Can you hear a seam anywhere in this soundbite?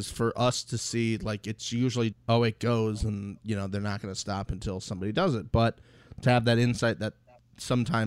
yes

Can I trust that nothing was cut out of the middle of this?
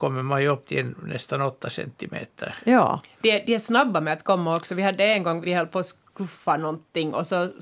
no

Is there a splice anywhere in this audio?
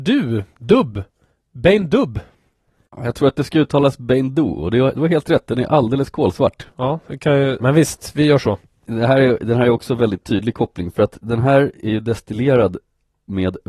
yes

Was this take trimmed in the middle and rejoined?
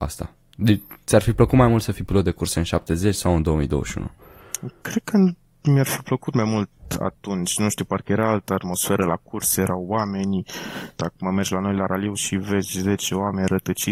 yes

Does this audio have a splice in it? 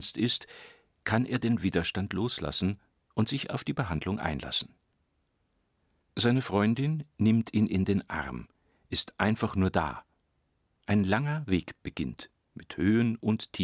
no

